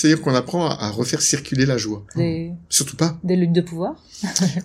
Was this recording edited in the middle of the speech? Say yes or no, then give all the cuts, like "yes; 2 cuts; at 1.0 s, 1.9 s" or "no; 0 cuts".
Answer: yes; 1 cut; at 2.1 s